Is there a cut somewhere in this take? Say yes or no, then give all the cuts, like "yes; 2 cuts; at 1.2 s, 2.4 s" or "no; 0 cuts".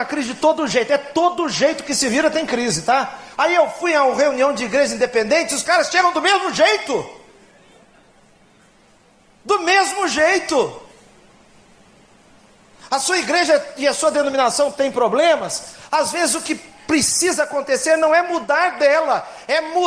yes; 1 cut; at 3.4 s